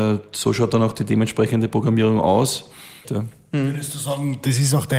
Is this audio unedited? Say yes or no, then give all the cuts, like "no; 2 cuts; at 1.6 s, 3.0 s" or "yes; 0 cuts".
no; 1 cut; at 3.0 s